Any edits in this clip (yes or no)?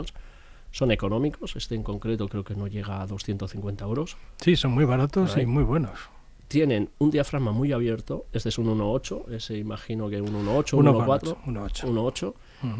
no